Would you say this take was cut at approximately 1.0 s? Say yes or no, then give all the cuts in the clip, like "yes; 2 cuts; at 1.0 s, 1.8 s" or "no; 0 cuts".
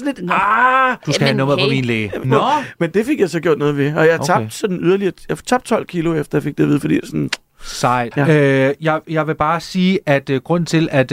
no; 2 cuts; at 2.2 s, 8.1 s